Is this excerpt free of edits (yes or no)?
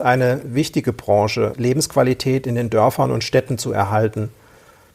no